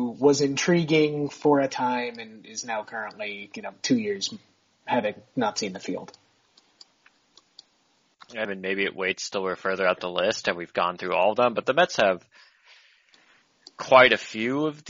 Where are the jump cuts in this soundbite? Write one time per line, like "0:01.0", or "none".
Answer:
0:08.4